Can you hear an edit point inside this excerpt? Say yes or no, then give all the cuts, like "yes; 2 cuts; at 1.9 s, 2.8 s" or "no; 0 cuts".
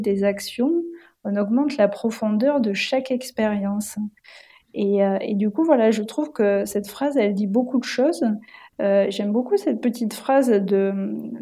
yes; 1 cut; at 8.7 s